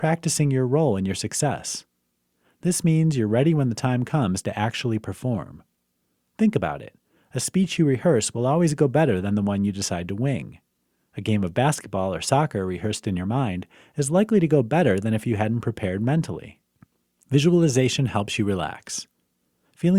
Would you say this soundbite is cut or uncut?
uncut